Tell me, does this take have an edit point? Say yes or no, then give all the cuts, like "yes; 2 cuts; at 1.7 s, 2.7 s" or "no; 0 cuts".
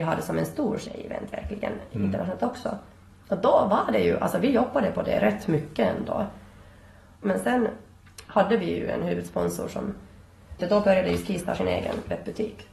yes; 2 cuts; at 7.1 s, 10.6 s